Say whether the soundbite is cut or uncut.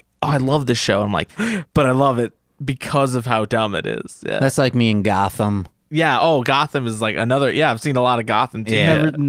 cut